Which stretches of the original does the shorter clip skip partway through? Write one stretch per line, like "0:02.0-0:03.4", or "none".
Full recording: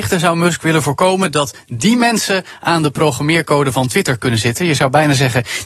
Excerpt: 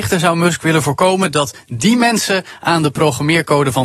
none